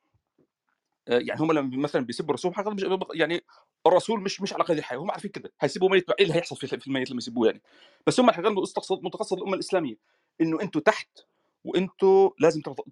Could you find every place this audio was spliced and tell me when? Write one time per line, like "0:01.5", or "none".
none